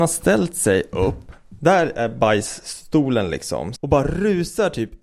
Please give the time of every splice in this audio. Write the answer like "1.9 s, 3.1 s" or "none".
3.8 s